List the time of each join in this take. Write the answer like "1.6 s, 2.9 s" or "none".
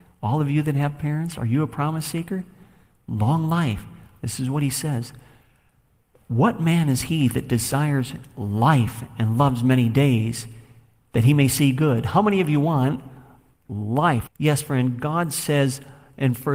14.3 s